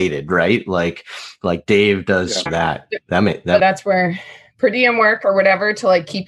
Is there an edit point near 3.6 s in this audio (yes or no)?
yes